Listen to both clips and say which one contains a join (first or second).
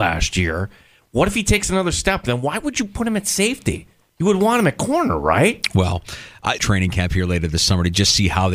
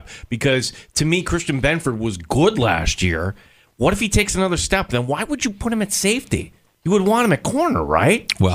first